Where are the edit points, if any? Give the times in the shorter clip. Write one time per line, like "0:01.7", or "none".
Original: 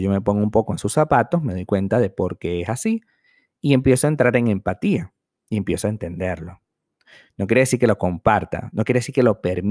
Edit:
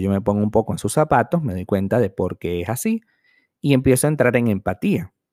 none